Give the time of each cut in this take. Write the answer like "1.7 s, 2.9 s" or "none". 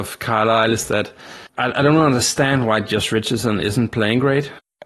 1.5 s